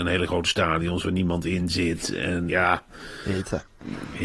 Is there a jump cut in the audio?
yes; 1 cut; at 2.5 s

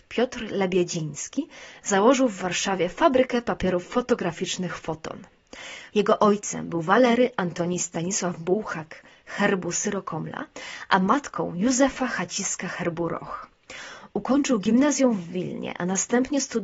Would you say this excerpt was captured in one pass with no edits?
no; 1 cut; at 5.9 s

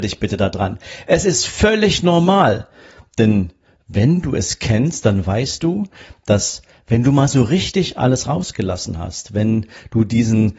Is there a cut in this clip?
no; 0 cuts

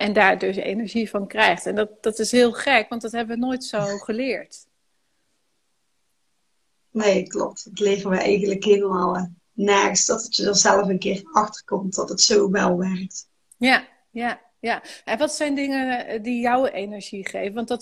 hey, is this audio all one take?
yes; 0 cuts

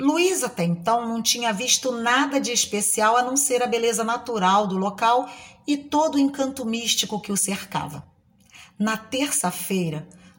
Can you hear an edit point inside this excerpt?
no; 0 cuts

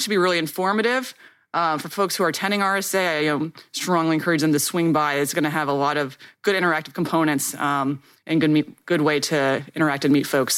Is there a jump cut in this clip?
no; 0 cuts

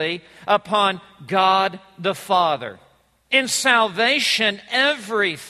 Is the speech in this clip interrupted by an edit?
no; 0 cuts

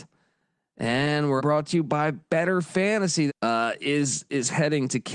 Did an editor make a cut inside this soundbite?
yes; 2 cuts; at 1.4 s, 3.3 s

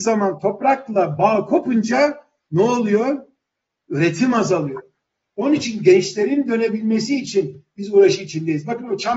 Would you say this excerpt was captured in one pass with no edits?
yes; 0 cuts

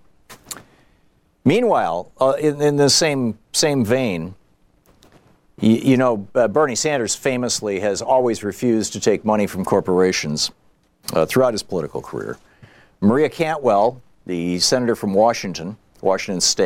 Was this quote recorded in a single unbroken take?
yes; 0 cuts

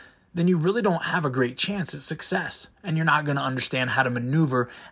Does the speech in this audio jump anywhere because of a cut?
yes; 1 cut; at 2.7 s

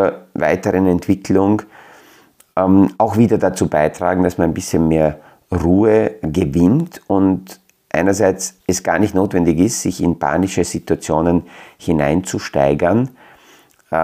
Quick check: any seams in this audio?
yes; 2 cuts; at 6.2 s, 8.6 s

